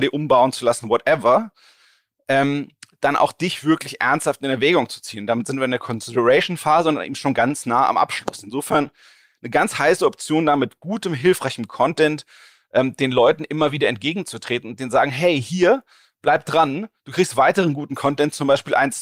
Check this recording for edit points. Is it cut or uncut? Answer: uncut